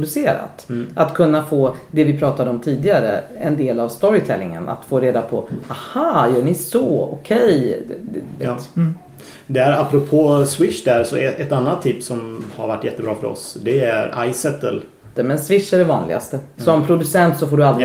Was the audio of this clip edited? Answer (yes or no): yes